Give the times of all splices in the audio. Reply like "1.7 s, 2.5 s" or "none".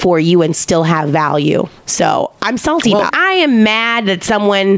1.8 s, 3.1 s